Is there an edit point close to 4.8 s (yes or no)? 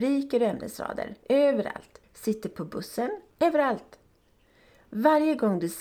no